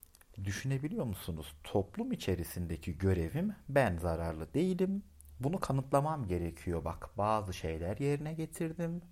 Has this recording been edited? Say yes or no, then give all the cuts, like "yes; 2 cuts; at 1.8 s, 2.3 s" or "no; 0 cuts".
no; 0 cuts